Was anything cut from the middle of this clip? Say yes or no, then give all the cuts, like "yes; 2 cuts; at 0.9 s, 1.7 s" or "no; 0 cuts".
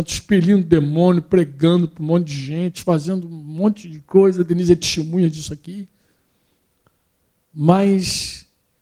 no; 0 cuts